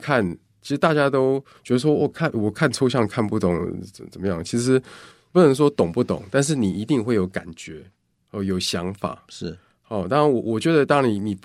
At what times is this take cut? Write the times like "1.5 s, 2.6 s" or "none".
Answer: none